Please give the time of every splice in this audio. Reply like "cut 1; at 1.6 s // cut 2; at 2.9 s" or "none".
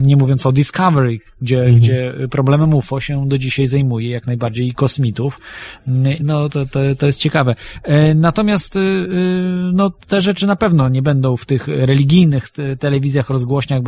cut 1; at 6.2 s